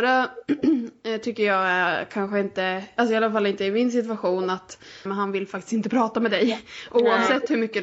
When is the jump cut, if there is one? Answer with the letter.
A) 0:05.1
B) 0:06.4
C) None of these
A